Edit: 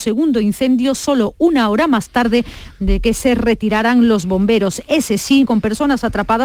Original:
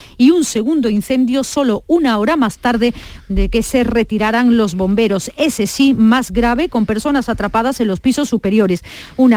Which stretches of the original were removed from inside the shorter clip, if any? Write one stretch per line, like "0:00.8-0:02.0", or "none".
0:05.9-0:06.7